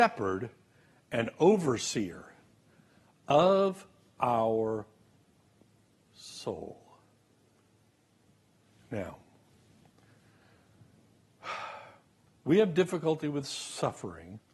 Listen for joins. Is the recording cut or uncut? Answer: uncut